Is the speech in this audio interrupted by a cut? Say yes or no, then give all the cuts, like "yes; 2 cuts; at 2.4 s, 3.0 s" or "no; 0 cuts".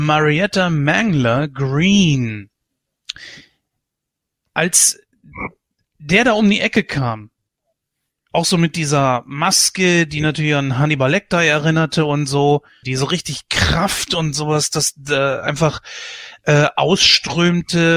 yes; 1 cut; at 12.8 s